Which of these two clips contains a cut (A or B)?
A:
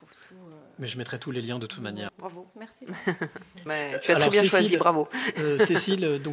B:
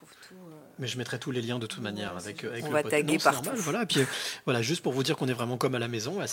A